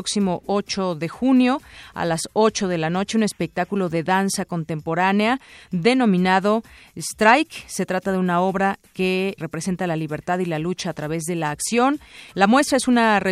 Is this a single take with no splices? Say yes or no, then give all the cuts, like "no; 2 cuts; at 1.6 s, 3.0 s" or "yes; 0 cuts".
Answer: no; 2 cuts; at 9.4 s, 12.3 s